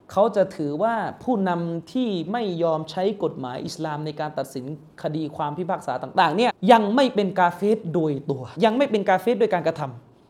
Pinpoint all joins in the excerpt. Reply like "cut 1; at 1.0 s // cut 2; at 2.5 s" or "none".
cut 1; at 6.5 s // cut 2; at 8.6 s